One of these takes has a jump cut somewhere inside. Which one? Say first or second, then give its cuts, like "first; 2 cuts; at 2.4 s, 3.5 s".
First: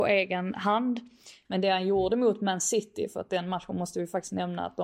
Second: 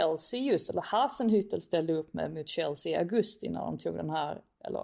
first; 1 cut; at 1.4 s